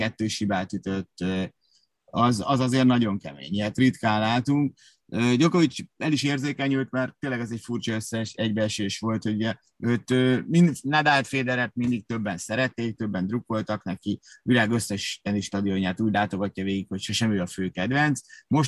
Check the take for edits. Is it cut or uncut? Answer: cut